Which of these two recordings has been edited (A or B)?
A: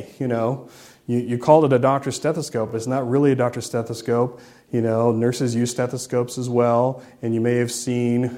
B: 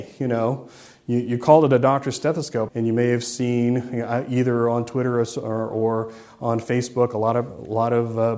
B